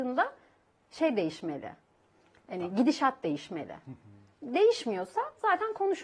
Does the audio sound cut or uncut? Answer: uncut